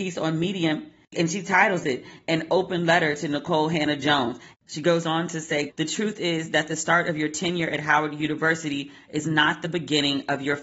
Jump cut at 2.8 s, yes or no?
no